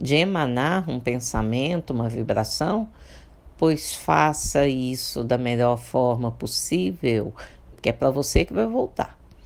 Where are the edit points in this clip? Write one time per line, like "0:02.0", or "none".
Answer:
0:01.9
0:07.7